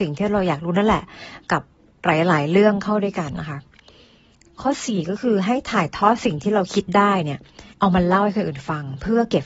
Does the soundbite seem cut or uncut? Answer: cut